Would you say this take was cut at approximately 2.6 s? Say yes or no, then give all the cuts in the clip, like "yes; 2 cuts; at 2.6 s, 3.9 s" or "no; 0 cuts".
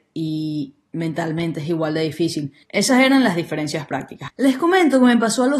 yes; 2 cuts; at 2.6 s, 4.3 s